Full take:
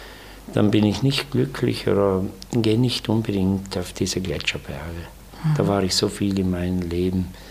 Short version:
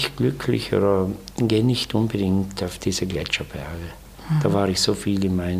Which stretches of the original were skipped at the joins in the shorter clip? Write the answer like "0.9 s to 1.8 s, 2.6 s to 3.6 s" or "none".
none